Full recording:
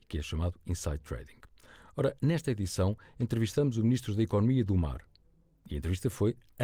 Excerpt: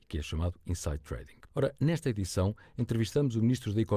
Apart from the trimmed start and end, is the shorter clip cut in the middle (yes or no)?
yes